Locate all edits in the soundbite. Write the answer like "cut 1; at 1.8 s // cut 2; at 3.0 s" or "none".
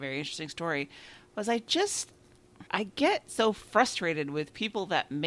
cut 1; at 2.7 s